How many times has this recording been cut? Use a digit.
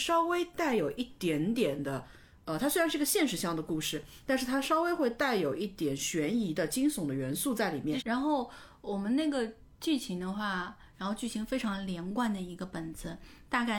2